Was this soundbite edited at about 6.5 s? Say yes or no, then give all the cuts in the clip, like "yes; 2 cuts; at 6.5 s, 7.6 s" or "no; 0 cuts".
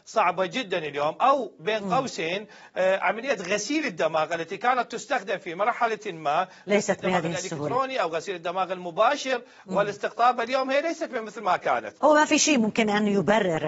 no; 1 cut; at 12.0 s